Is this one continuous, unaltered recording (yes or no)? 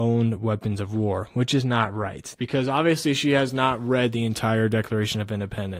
no